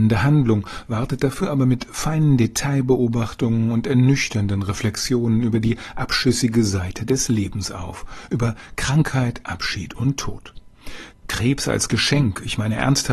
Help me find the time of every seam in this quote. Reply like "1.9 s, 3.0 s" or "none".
11.1 s